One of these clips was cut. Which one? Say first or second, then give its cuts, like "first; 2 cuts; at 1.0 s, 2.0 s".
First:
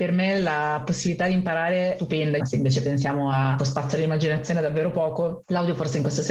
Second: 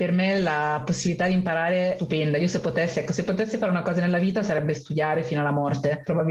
first; 2 cuts; at 2.4 s, 3.6 s